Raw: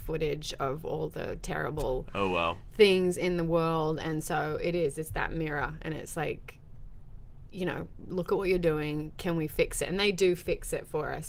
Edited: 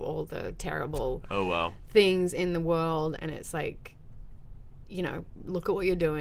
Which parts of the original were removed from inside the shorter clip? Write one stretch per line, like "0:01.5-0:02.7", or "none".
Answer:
0:04.0-0:05.8

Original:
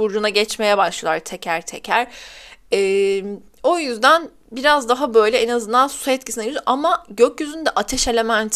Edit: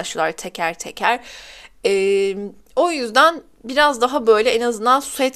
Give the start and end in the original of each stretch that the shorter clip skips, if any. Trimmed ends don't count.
none

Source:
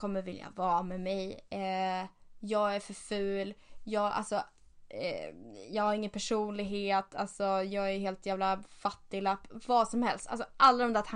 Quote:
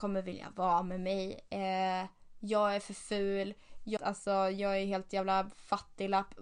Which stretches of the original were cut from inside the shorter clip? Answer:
0:04.0-0:07.1

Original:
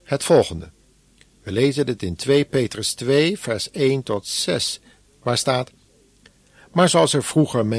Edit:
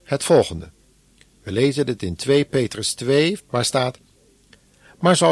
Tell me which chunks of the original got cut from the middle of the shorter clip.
0:03.4-0:05.1

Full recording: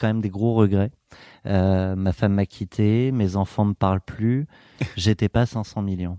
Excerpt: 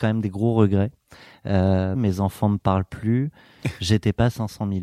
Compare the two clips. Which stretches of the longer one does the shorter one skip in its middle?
0:02.0-0:03.1

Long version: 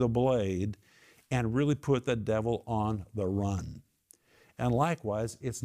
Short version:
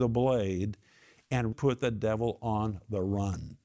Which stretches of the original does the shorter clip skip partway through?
0:01.5-0:01.8

